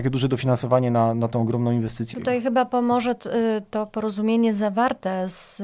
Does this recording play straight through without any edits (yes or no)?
no